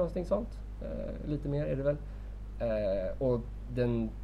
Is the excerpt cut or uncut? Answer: uncut